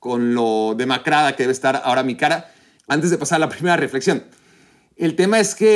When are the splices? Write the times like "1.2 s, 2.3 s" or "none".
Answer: 2.8 s